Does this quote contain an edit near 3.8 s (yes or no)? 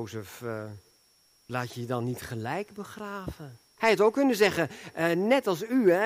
yes